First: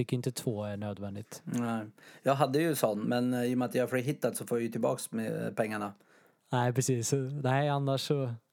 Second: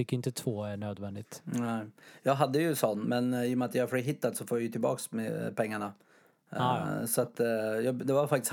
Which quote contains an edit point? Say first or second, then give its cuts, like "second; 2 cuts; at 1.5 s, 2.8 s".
first; 1 cut; at 6.4 s